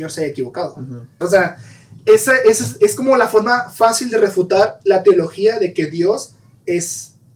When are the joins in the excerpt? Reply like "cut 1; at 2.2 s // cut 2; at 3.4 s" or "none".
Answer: cut 1; at 1.2 s

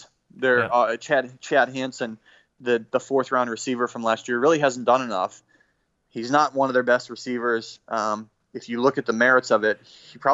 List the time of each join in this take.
none

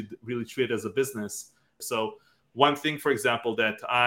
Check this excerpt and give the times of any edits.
cut 1; at 1.8 s

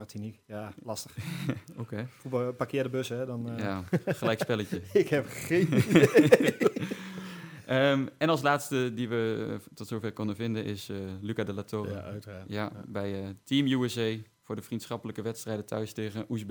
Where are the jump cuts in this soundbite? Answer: none

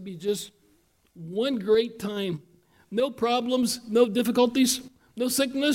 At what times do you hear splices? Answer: none

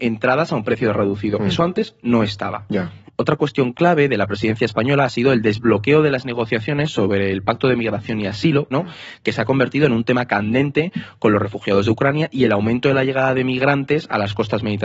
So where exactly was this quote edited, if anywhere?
cut 1; at 3.1 s // cut 2; at 8.7 s

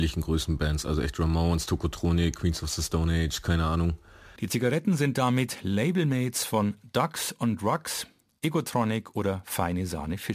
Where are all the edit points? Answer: cut 1; at 4.4 s

